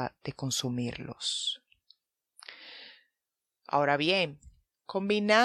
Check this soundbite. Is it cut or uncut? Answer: uncut